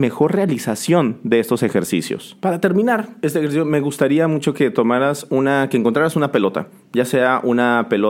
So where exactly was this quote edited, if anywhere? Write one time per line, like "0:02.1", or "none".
0:02.4